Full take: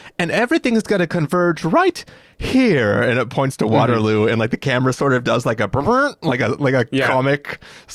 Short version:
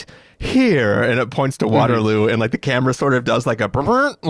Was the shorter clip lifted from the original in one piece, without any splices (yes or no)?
yes